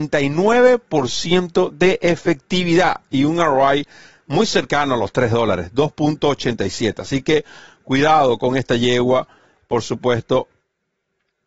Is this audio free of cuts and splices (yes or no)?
yes